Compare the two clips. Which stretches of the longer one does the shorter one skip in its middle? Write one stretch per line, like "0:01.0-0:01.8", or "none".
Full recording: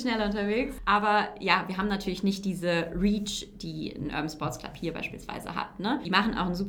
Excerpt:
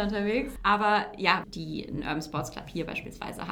0:01.7-0:03.5